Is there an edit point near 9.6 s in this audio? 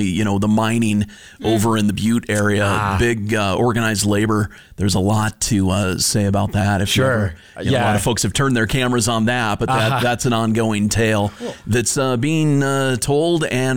no; 0 cuts

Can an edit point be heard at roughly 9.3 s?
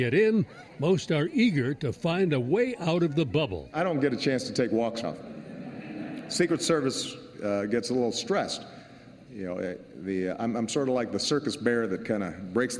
yes; 2 cuts; at 5.0 s, 9.3 s

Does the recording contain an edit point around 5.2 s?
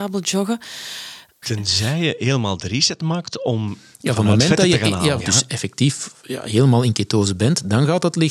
yes; 2 cuts; at 1.4 s, 5.2 s

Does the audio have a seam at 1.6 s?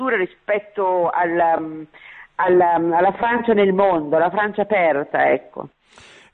no; 0 cuts

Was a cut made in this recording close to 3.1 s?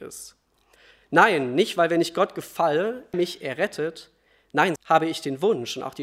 yes; 2 cuts; at 3.1 s, 4.8 s

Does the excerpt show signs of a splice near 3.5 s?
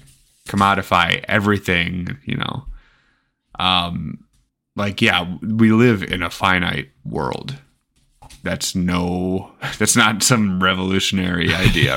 yes; 1 cut; at 3.5 s

